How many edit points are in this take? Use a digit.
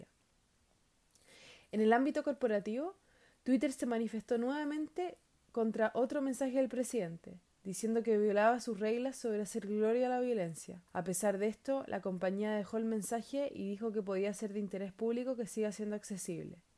1